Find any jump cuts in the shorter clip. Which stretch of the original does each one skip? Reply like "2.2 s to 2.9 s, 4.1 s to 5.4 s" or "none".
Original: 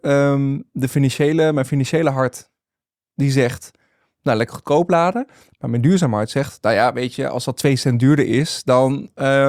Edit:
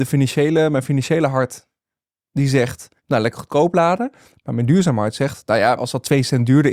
3.8 s to 4.1 s, 6.9 s to 7.3 s